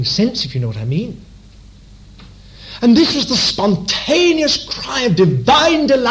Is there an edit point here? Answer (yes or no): no